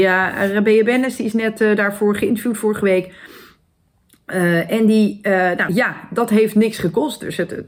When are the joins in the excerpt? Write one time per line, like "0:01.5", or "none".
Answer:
0:05.7